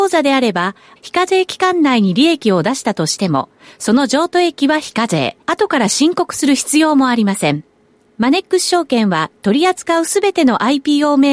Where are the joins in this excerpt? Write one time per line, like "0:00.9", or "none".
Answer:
0:01.0
0:05.4